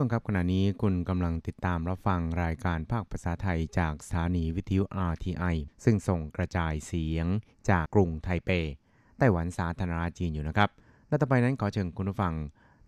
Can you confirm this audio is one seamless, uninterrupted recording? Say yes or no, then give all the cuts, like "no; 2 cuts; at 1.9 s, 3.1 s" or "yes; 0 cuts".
no; 1 cut; at 7.9 s